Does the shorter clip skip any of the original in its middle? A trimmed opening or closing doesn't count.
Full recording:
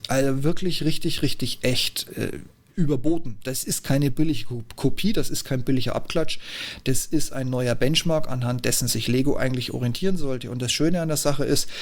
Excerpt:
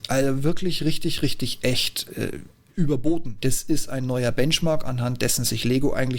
yes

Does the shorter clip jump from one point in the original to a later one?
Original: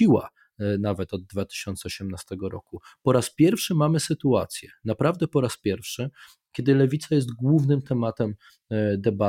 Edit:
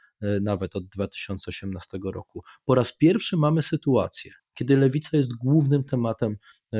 yes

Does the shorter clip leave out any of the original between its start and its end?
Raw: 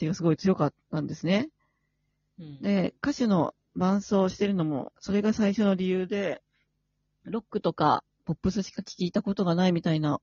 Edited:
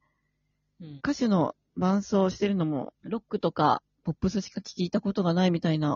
yes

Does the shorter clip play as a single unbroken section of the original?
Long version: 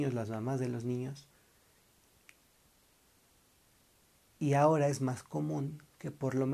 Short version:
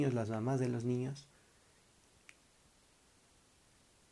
yes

